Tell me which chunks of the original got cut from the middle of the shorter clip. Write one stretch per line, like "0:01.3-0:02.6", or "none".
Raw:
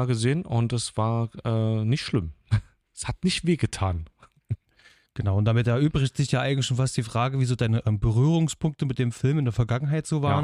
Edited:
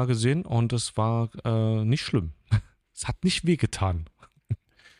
none